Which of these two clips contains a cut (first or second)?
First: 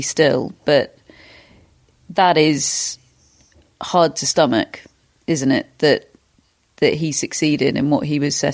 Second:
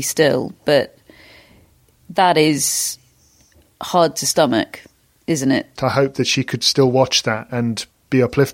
second